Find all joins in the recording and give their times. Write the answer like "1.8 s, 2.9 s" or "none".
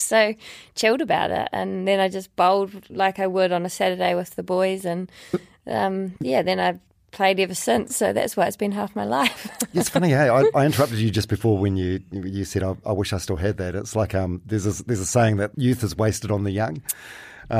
15.5 s